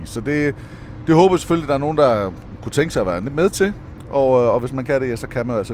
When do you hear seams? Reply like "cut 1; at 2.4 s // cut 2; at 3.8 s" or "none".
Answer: none